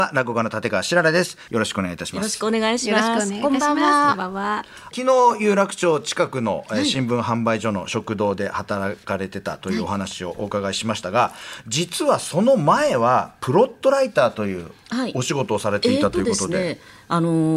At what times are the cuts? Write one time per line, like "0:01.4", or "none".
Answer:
0:01.5